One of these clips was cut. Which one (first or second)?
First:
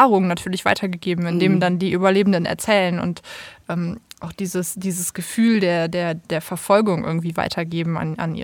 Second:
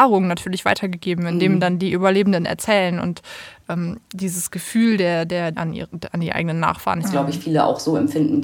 second